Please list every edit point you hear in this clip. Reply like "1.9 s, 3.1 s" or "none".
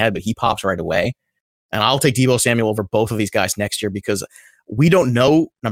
none